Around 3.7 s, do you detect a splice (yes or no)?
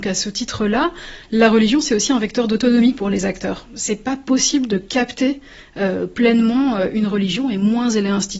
no